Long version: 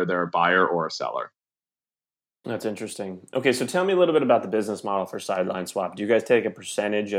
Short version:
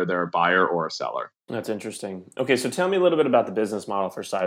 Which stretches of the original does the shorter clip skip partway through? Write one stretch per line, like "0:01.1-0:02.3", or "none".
0:01.4-0:02.3